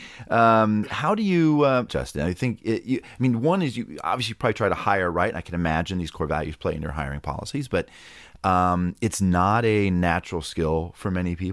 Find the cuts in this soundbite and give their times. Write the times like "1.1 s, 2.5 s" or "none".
1.9 s